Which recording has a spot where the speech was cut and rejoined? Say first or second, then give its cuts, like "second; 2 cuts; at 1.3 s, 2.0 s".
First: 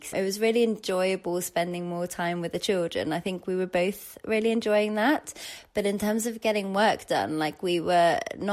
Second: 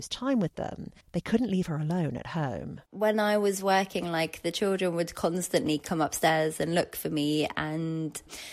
second; 2 cuts; at 1.0 s, 2.9 s